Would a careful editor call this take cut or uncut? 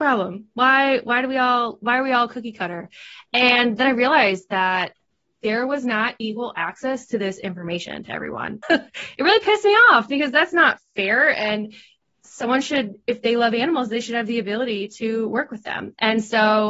cut